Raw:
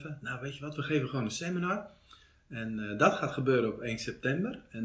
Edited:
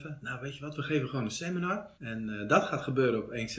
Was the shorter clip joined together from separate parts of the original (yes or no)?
yes